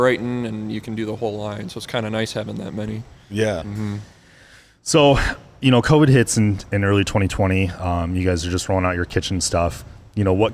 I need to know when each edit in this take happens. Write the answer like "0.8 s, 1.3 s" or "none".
3.6 s